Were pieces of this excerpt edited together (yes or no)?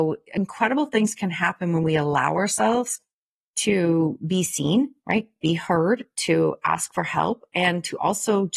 no